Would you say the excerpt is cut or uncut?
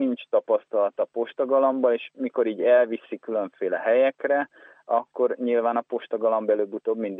uncut